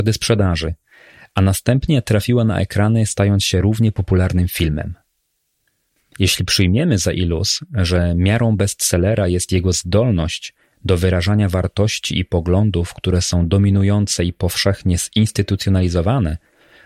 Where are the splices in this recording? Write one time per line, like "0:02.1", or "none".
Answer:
none